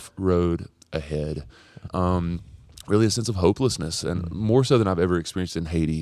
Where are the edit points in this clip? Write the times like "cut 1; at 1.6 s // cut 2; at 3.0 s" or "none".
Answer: cut 1; at 1.9 s